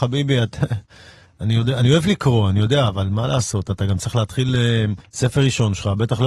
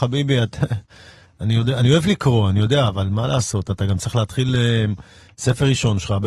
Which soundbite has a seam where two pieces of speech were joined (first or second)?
first